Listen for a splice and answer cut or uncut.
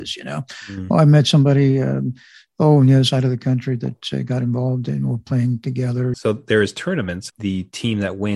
cut